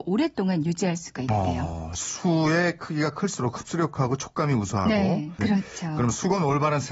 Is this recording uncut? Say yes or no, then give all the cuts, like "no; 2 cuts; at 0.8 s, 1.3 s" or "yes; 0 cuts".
no; 1 cut; at 5.4 s